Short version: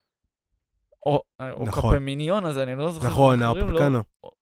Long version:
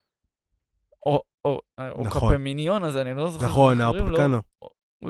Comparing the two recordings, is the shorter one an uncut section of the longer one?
no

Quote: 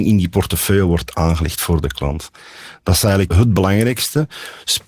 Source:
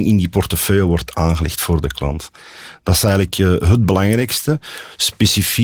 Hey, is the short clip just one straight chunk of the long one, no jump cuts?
no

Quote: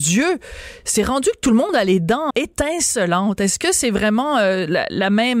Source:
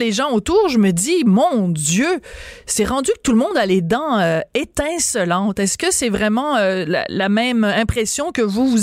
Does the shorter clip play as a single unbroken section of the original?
no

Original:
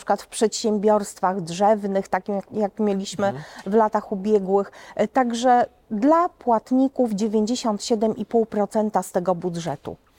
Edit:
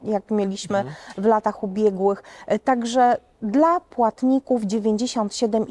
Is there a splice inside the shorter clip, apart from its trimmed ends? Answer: no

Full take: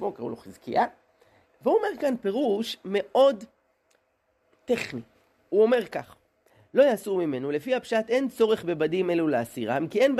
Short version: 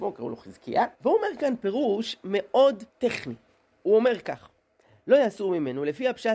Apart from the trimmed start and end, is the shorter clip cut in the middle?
yes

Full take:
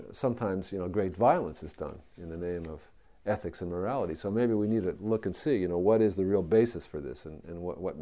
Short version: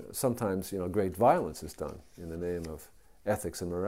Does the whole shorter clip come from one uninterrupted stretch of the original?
yes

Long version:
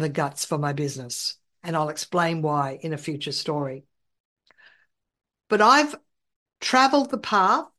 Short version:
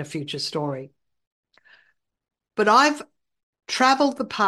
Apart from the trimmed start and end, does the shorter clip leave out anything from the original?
no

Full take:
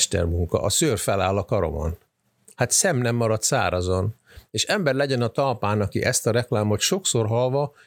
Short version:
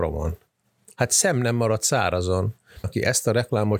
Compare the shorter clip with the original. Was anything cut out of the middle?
yes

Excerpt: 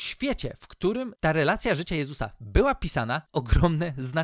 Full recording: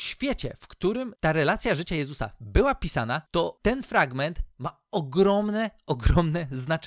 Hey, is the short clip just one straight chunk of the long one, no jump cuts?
no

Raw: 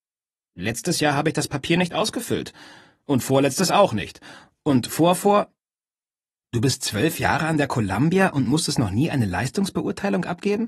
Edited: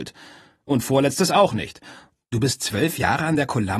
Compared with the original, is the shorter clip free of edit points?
no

